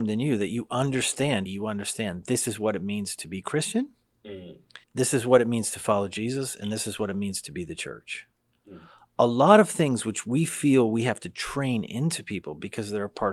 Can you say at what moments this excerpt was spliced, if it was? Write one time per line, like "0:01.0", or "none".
0:01.5
0:04.8